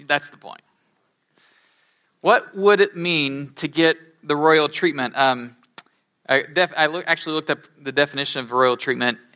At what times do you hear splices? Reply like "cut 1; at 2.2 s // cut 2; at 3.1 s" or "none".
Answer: none

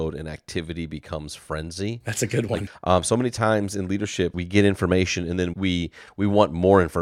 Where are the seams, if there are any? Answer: cut 1; at 2.7 s // cut 2; at 4.3 s // cut 3; at 5.5 s

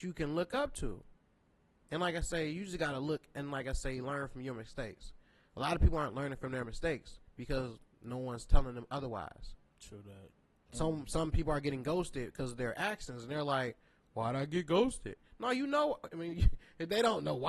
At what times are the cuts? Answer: none

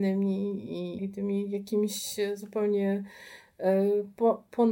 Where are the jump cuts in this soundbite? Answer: cut 1; at 1.0 s

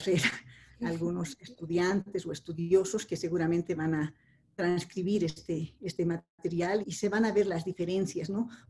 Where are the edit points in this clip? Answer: cut 1; at 6.8 s

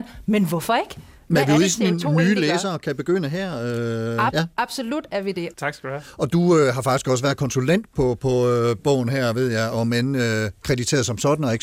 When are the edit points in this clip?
cut 1; at 4.3 s // cut 2; at 5.5 s // cut 3; at 9.7 s

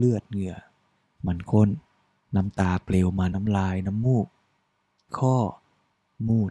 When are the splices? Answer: cut 1; at 3.3 s // cut 2; at 5.1 s

